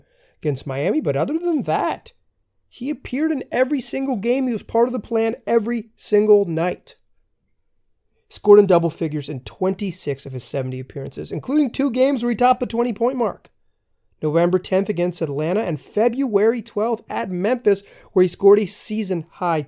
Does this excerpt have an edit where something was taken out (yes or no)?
no